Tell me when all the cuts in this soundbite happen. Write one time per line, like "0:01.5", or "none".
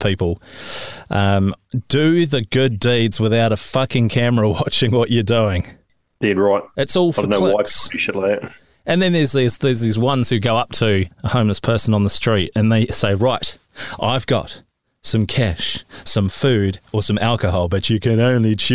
none